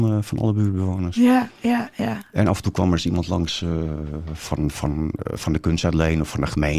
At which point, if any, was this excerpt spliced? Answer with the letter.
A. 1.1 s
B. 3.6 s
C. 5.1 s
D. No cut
D